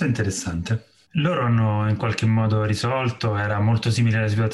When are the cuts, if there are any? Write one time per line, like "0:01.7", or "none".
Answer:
0:01.0